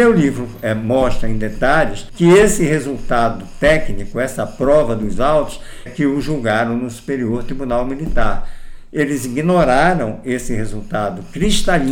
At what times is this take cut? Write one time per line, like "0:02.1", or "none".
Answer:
0:05.9